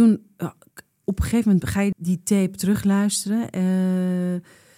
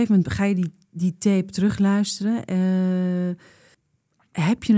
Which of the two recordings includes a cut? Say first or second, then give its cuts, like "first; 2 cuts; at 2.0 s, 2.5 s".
first; 1 cut; at 1.9 s